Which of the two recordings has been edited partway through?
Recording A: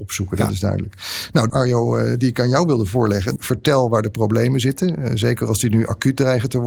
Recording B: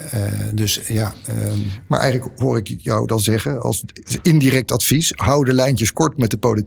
A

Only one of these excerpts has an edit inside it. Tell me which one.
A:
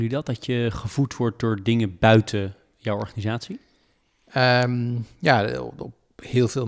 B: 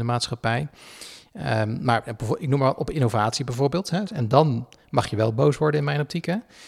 B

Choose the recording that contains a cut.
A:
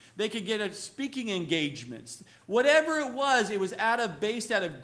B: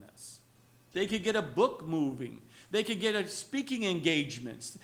B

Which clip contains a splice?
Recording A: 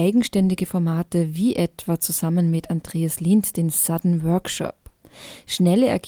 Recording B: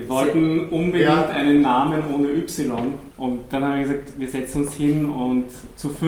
B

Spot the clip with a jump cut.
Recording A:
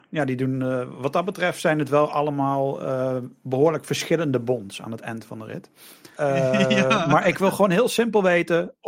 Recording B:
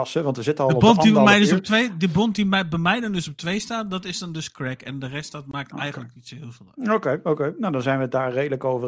A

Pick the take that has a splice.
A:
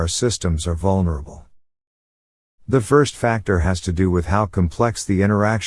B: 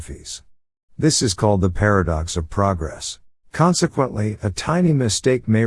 B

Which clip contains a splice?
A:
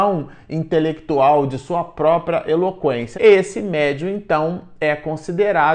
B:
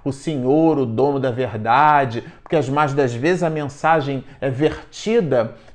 A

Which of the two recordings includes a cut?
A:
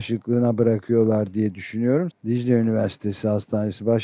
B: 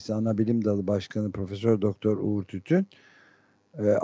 A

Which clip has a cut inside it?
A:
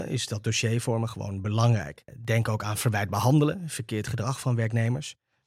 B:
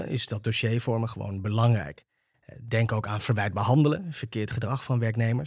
A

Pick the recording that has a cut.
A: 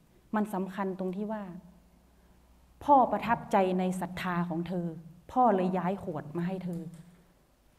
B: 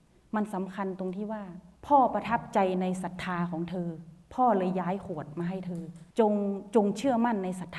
B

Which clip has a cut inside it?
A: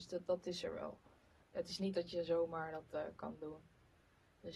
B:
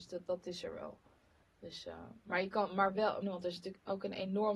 B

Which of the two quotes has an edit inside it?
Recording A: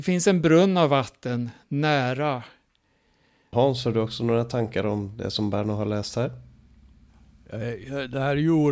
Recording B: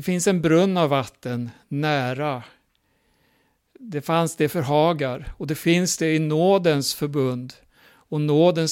A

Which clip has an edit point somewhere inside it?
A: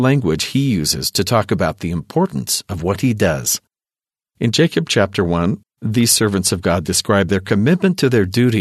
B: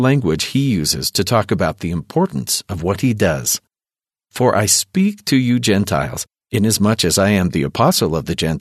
A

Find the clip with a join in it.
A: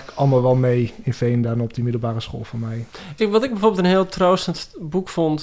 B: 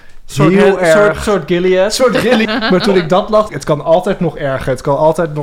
B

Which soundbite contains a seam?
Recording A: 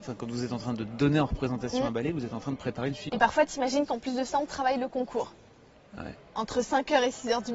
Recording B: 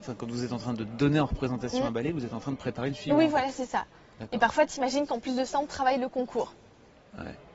A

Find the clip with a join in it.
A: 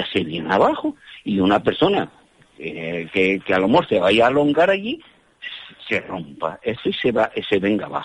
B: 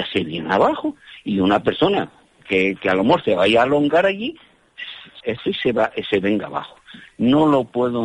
B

